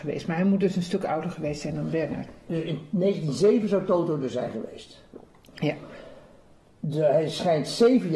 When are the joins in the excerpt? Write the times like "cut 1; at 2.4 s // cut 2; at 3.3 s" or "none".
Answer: none